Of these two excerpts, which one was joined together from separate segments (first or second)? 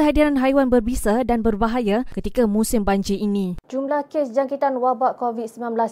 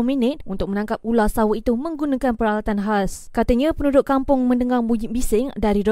first